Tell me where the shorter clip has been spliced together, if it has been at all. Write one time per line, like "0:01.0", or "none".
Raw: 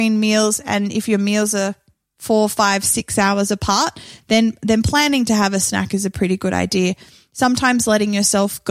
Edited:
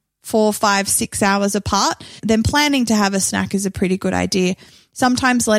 0:02.2